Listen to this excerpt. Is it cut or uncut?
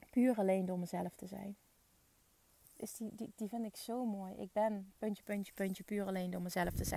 uncut